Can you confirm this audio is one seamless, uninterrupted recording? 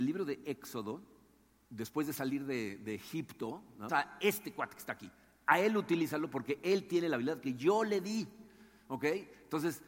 no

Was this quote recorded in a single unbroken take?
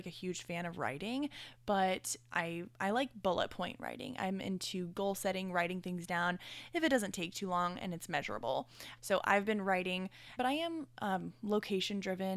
no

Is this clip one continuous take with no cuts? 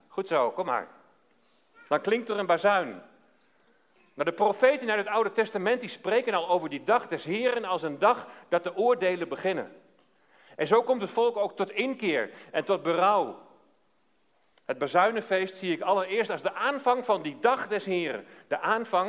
yes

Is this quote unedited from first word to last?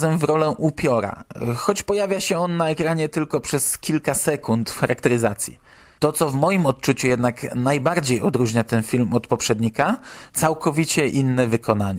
no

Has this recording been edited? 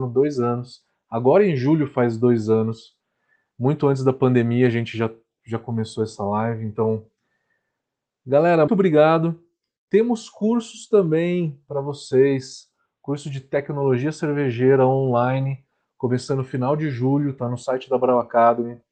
yes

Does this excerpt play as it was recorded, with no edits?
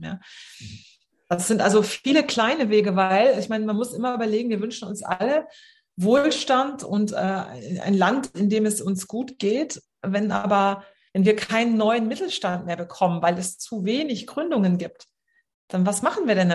yes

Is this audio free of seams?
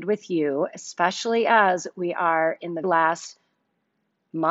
no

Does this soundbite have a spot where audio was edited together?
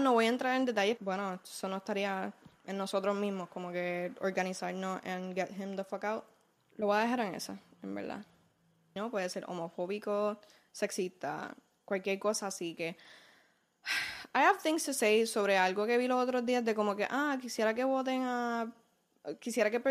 yes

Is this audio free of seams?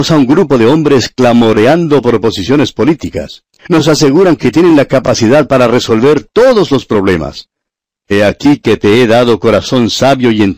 no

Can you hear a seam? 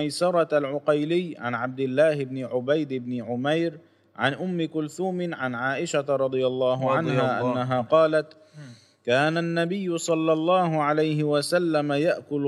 no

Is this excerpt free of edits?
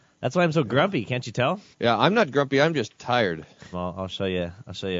no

